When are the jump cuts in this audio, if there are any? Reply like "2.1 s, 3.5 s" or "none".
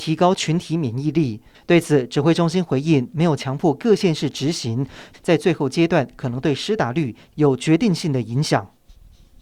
1.5 s, 5.1 s

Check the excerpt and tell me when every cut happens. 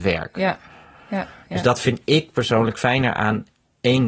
none

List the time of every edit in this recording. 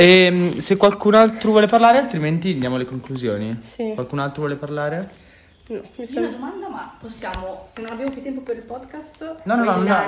none

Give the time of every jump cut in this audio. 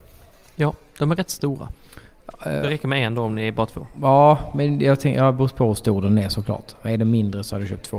none

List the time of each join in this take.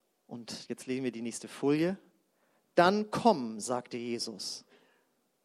none

